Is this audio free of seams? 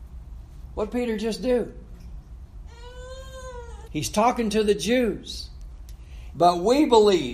no; 2 cuts; at 3.9 s, 6.3 s

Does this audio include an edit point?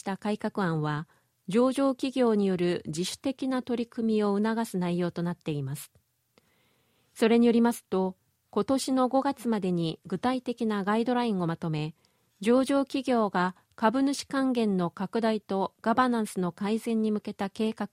no; 0 cuts

